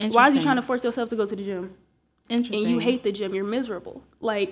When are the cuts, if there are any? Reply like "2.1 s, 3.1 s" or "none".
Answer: none